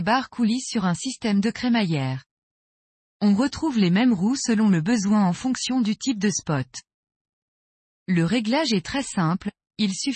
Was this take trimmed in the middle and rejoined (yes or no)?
no